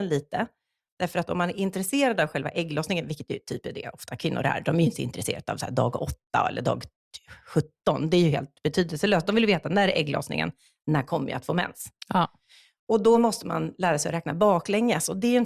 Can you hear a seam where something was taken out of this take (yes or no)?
no